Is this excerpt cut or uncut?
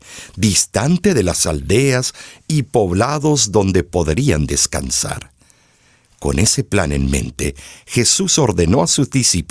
uncut